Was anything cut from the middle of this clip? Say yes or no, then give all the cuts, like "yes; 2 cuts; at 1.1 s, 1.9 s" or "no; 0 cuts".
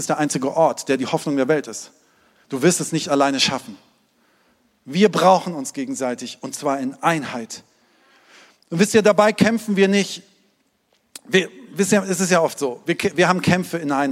no; 0 cuts